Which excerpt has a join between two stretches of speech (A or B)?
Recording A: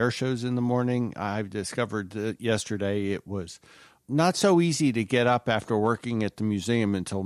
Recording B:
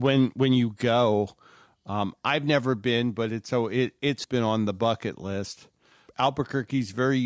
B